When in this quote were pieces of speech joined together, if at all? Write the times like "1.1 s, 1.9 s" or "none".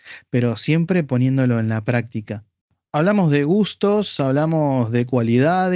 none